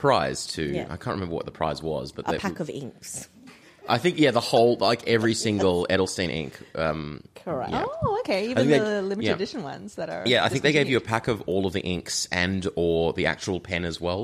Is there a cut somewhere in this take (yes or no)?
no